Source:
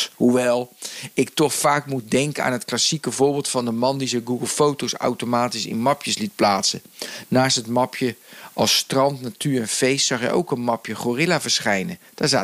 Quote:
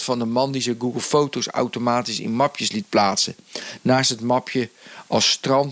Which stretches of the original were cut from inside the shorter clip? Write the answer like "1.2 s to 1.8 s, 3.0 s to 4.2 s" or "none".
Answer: none

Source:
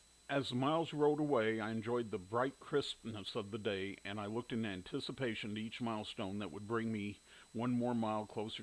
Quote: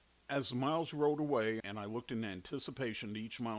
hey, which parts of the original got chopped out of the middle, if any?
1.6 s to 4.0 s

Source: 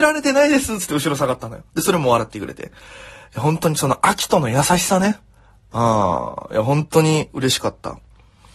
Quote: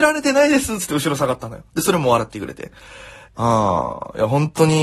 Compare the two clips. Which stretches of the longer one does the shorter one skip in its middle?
3.3 s to 5.6 s

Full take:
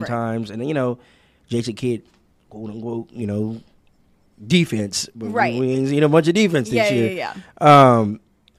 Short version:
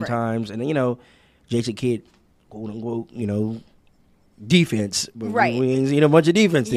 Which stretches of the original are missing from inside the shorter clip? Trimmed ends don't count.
none

